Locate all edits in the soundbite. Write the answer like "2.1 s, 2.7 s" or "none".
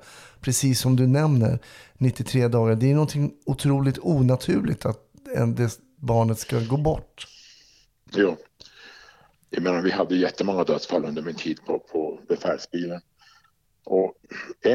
none